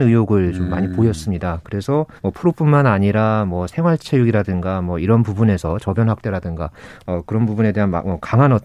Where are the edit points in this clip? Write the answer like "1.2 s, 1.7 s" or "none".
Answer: 2.2 s